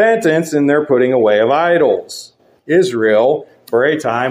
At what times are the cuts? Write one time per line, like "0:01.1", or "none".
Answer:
0:02.5